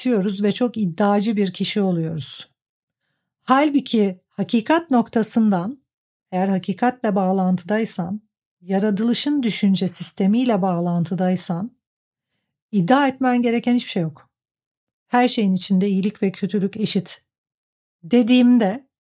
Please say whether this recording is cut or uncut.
cut